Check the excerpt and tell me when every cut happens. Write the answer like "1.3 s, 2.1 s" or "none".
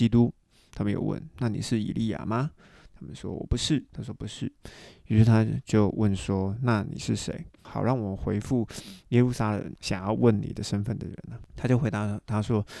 3.9 s